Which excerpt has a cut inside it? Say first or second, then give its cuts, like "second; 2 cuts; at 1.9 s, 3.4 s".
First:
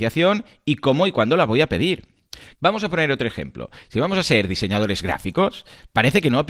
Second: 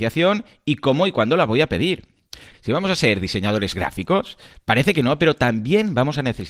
second; 1 cut; at 2.5 s